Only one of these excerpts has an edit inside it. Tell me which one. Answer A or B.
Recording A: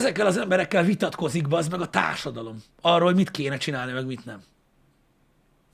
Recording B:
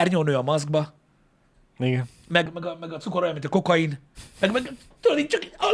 B